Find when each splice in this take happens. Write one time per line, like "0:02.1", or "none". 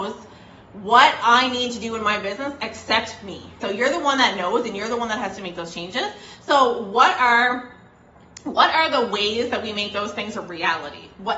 0:03.6